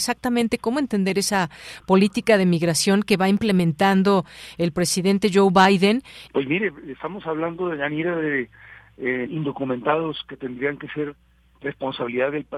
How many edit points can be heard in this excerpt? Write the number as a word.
two